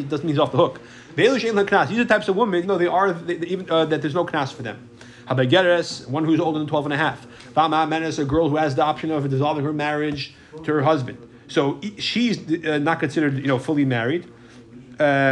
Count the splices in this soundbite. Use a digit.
1